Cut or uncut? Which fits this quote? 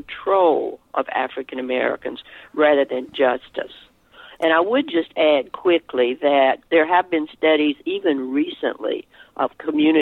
uncut